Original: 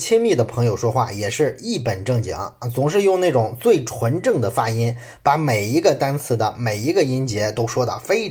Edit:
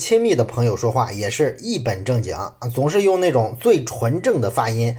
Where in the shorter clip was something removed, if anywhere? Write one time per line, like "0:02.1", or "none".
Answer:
none

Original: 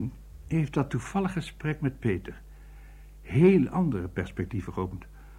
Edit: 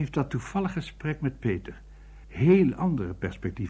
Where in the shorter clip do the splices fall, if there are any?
0:02.2

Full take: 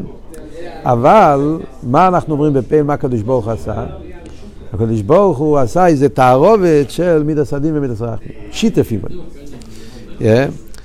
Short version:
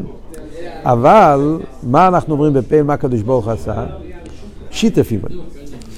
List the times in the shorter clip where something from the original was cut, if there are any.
0:04.7

